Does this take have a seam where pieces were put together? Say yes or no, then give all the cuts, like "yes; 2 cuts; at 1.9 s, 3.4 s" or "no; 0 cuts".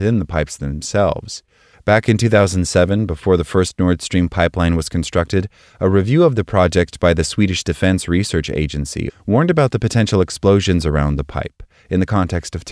yes; 2 cuts; at 1.7 s, 9.1 s